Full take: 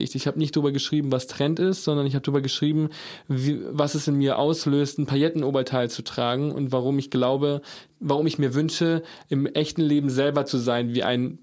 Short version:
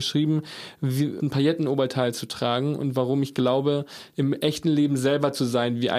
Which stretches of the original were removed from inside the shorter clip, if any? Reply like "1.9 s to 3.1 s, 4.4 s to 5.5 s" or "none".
3.7 s to 5.0 s, 7.9 s to 9.3 s